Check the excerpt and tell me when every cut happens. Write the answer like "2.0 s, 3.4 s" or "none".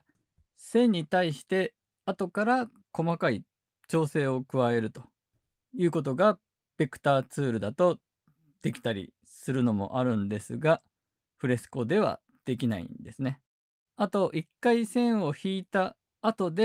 13.9 s